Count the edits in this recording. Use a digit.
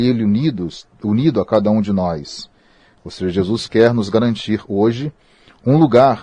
1